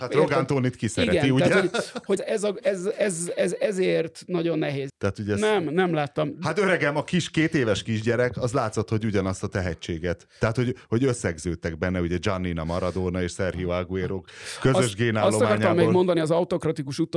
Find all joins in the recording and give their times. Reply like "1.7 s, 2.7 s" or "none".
2.2 s, 4.9 s